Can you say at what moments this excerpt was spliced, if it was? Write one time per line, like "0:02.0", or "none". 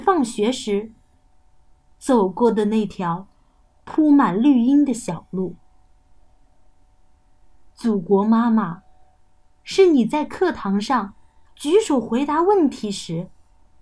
none